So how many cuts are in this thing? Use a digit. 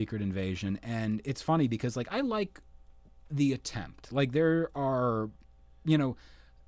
0